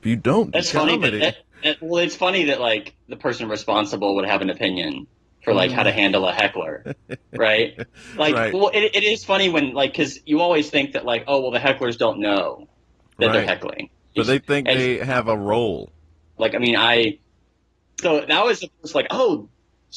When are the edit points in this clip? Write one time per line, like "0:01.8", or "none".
0:16.4
0:18.0
0:19.1